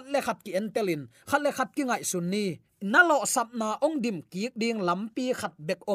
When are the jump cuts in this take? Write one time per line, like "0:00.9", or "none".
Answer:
0:02.7